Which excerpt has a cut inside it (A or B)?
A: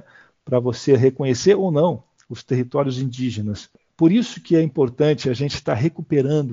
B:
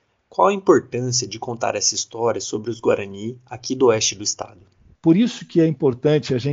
B